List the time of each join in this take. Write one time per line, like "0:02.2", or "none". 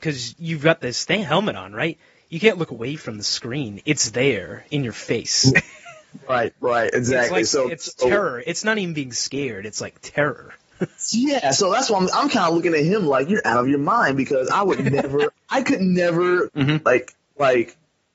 0:15.3
0:16.5